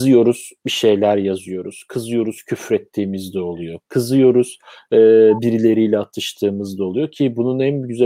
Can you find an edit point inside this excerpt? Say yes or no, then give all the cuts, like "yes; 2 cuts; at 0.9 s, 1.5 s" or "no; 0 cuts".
no; 0 cuts